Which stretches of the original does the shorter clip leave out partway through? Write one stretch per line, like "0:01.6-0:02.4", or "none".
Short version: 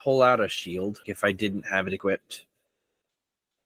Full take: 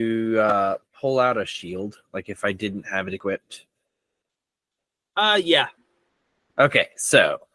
0:02.0-0:02.2

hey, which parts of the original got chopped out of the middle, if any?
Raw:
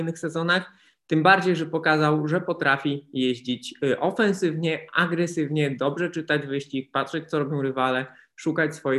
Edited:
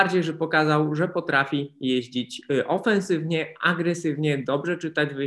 none

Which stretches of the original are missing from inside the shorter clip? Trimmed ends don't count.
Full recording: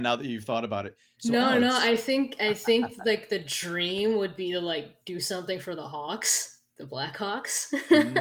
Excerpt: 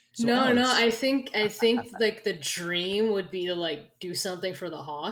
none

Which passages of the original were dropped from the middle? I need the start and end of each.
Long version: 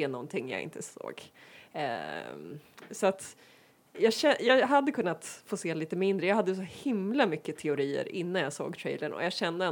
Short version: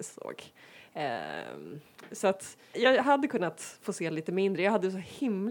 0:03.5-0:04.4

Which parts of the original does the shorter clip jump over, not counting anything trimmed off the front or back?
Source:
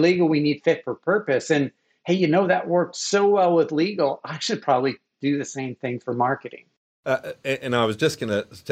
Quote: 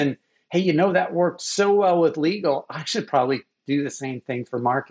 none

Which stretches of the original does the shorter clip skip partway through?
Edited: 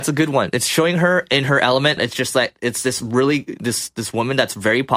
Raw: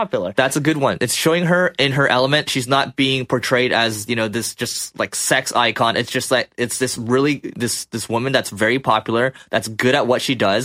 0:02.4-0:05.9

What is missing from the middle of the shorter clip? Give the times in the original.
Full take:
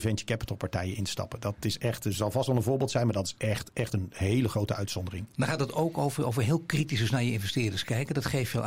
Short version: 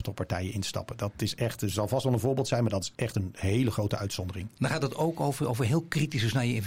0:03.4-0:03.7

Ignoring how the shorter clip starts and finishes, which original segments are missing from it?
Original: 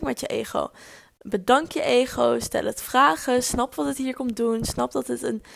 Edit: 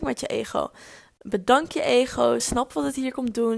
0:02.4-0:03.4

